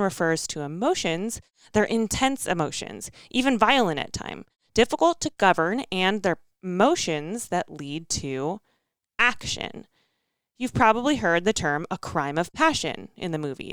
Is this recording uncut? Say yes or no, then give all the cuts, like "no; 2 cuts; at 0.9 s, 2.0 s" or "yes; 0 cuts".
yes; 0 cuts